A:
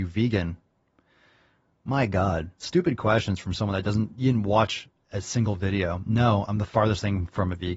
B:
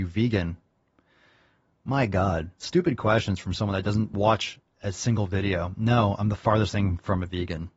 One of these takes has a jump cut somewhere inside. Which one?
B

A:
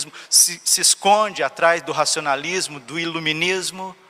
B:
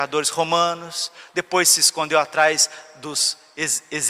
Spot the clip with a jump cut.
B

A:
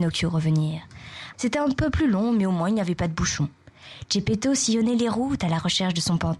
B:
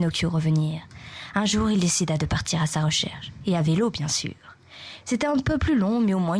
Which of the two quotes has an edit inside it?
A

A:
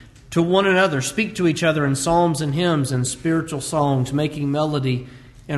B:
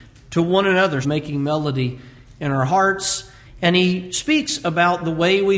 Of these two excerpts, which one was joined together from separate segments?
B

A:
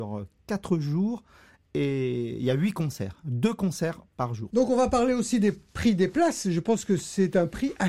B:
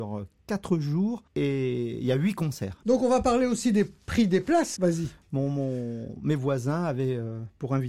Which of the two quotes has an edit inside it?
B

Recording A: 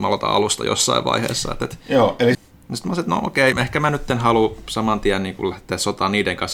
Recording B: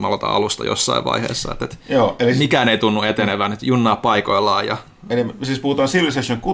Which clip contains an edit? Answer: A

